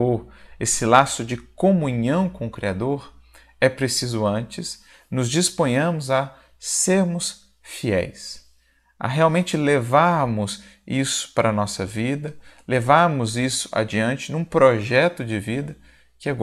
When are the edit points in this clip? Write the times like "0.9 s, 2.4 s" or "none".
none